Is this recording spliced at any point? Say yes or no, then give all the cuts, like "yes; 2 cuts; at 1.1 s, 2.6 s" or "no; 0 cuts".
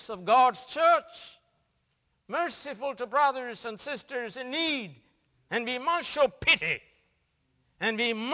yes; 1 cut; at 2.1 s